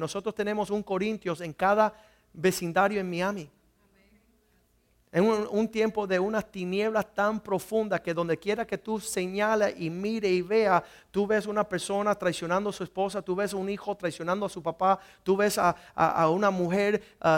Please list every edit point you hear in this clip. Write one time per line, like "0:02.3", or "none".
none